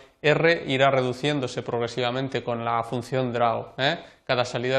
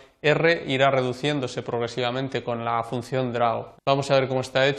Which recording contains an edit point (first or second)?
second